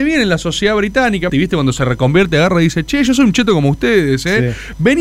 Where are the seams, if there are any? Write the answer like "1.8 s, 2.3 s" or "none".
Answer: 1.3 s